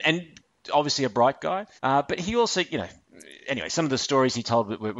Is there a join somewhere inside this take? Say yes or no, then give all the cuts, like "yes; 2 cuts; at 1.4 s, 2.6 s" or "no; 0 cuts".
yes; 1 cut; at 1.8 s